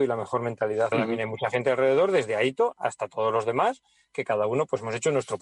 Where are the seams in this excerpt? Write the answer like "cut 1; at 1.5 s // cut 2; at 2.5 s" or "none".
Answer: cut 1; at 0.9 s